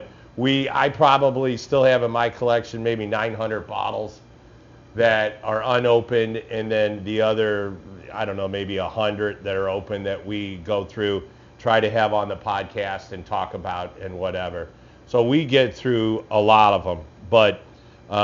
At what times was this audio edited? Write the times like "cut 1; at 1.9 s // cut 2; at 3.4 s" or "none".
none